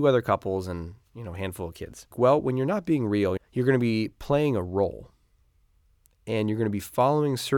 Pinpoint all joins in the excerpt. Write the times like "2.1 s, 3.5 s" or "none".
2.1 s, 3.4 s